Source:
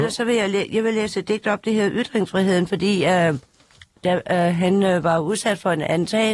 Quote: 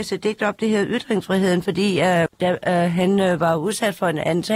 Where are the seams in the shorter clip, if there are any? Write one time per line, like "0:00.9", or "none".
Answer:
0:02.3

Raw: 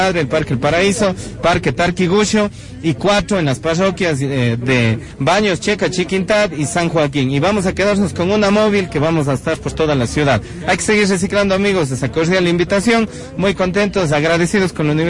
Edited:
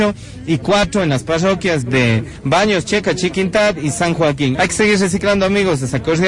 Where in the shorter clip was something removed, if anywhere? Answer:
0:01.8
0:04.5

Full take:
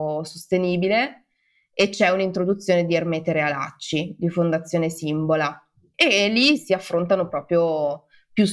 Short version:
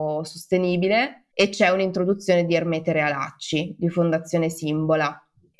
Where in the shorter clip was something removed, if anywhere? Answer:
0:01.3

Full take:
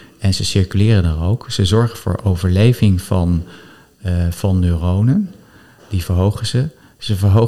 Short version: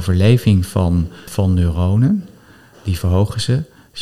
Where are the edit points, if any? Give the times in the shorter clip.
0:01.3

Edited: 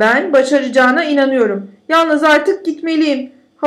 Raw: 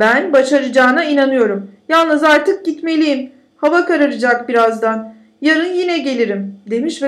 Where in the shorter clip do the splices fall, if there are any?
none

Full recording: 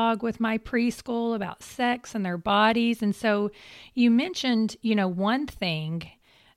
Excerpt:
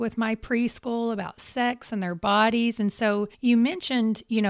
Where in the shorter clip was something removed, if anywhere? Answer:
0:03.3

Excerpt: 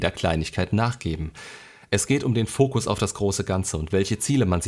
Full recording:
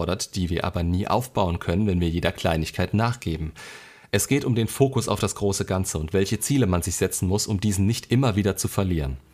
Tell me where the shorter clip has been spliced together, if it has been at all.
none

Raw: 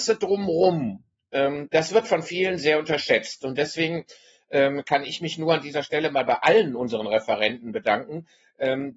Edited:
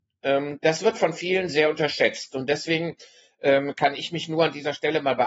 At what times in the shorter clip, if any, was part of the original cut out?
none

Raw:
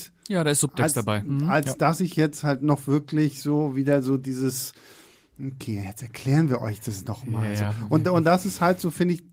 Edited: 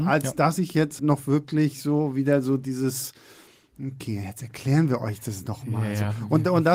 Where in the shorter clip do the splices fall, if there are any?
0:01.0

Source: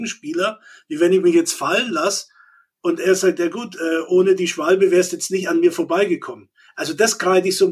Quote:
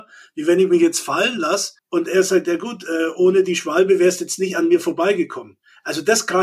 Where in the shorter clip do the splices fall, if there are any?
0:01.8

